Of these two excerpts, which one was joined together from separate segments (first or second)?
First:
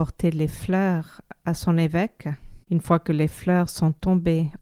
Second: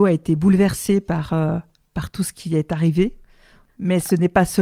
first